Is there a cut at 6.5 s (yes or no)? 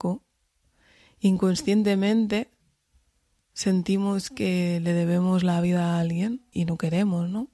yes